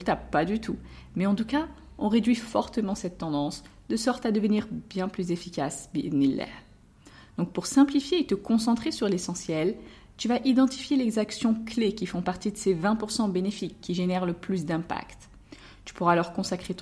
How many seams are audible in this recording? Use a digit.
0